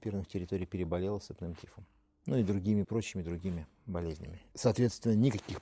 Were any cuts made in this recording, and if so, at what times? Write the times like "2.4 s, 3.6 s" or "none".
2.8 s, 4.5 s